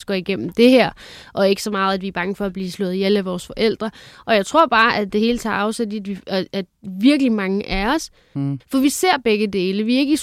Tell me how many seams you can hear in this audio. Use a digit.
1